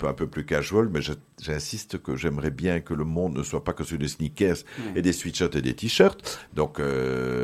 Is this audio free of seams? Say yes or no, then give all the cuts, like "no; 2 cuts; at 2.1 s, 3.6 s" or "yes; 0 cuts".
no; 1 cut; at 6.5 s